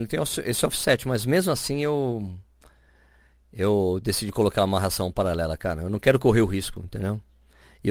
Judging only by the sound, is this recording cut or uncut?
uncut